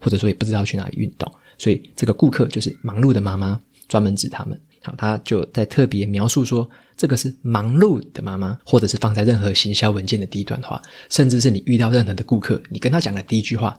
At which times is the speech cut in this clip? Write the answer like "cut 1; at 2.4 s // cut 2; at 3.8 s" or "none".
cut 1; at 4.7 s // cut 2; at 8.6 s

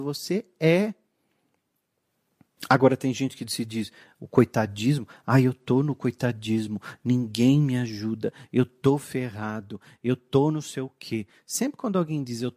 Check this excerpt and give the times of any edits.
cut 1; at 2.6 s

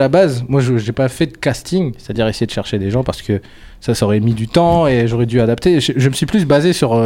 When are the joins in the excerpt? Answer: none

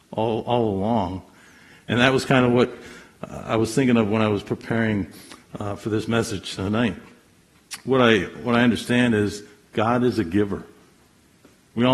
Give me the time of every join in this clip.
none

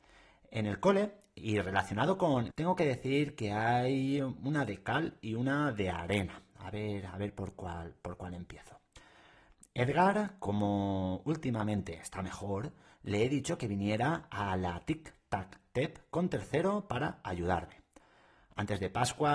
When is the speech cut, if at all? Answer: cut 1; at 2.5 s

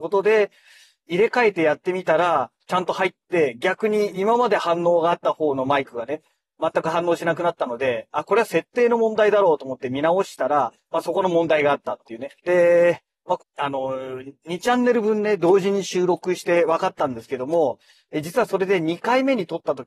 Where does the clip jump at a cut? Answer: cut 1; at 12.4 s // cut 2; at 13.4 s

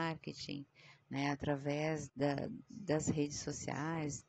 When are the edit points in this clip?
cut 1; at 2.1 s

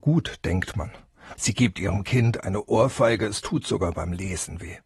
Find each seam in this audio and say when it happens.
cut 1; at 1.4 s

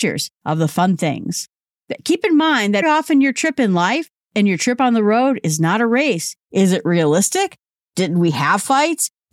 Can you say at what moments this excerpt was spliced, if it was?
cut 1; at 2.8 s // cut 2; at 6.4 s

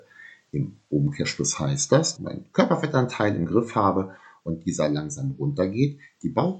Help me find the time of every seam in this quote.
cut 1; at 2.1 s

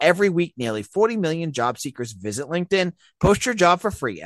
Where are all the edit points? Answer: none

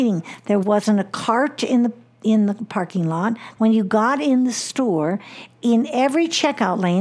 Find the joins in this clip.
cut 1; at 3.6 s

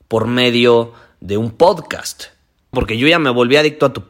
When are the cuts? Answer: cut 1; at 2.7 s

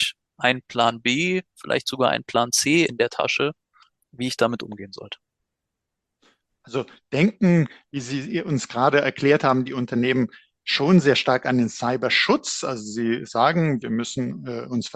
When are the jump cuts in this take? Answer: cut 1; at 13.8 s

